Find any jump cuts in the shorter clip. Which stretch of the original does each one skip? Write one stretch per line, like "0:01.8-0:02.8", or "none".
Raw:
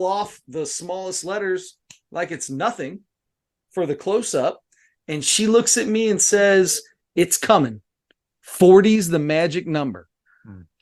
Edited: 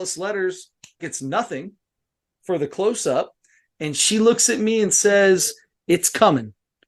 0:02.1-0:02.3